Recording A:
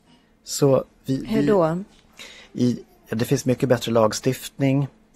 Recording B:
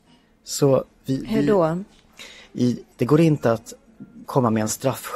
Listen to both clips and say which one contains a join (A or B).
B